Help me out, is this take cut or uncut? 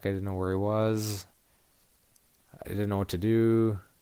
uncut